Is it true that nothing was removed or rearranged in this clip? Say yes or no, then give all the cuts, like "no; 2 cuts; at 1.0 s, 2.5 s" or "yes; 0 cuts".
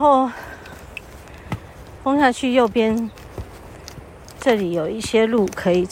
yes; 0 cuts